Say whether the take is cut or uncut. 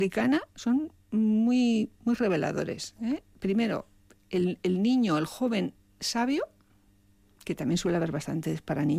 uncut